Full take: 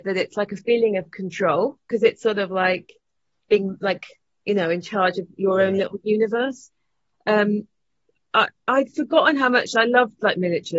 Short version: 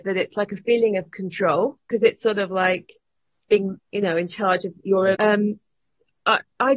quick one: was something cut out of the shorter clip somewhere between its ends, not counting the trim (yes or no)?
yes